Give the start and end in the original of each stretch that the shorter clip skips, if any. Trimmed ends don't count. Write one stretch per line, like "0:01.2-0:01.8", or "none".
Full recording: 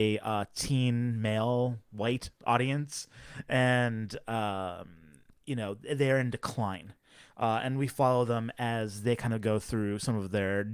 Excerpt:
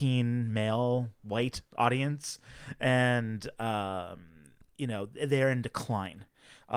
none